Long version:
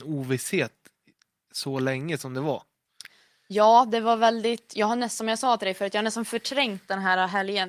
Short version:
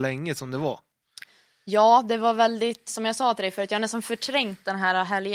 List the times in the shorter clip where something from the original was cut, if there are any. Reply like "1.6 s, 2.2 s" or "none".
2.9 s